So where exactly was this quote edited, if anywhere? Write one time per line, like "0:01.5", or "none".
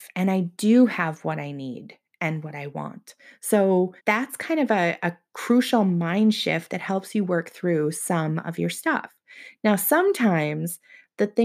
0:04.0